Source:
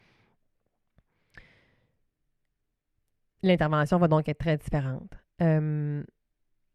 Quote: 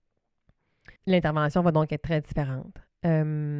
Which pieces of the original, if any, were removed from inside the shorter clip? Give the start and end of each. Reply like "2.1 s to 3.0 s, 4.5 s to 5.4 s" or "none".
1.4 s to 3.3 s